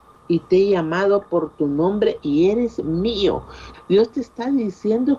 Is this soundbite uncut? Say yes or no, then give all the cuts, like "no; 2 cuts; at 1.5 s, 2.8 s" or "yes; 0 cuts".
no; 1 cut; at 3.7 s